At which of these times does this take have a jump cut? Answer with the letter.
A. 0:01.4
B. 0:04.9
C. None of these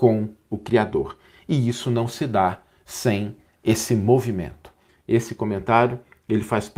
B